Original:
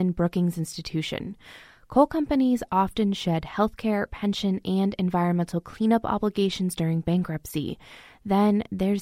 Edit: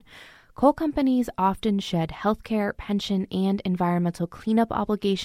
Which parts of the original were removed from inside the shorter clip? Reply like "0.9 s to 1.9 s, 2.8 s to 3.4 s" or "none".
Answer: none